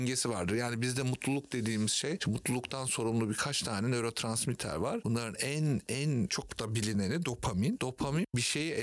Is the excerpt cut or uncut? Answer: uncut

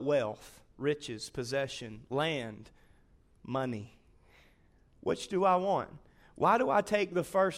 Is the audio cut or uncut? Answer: uncut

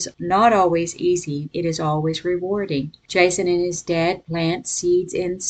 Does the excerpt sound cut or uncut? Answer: cut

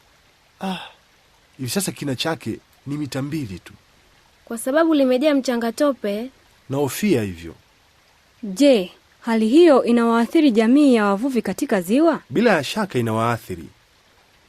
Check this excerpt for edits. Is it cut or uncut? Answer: cut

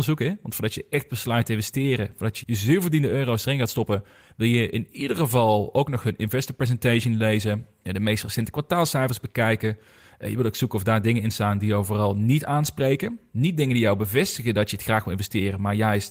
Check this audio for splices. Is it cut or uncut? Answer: cut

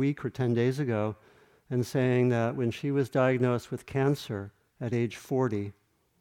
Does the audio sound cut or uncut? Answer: uncut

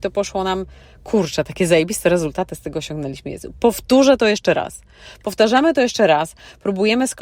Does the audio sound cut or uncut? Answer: uncut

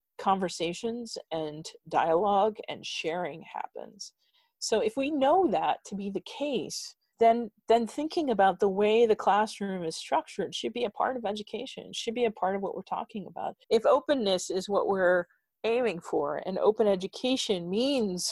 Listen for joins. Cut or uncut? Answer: cut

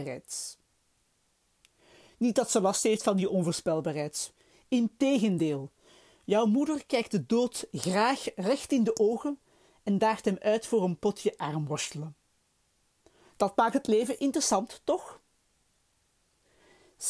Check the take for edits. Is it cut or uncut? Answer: uncut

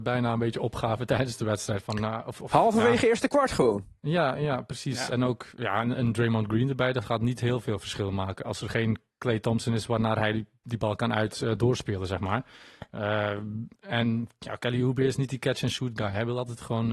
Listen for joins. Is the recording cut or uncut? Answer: uncut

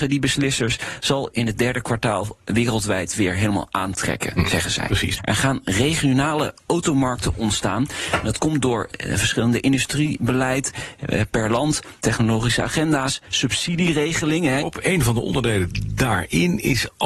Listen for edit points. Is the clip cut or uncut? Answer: cut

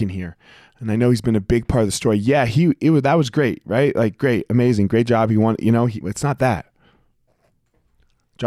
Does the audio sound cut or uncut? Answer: cut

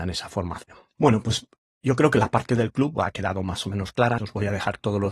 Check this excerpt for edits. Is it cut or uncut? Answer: cut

